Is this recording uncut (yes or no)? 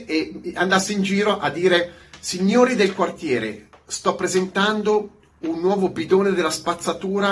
yes